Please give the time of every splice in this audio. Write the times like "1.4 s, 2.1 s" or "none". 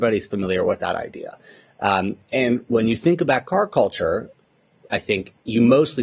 none